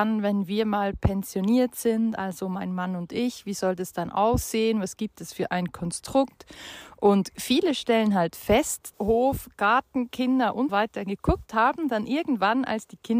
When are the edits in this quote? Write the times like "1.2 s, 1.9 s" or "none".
8.9 s, 10.7 s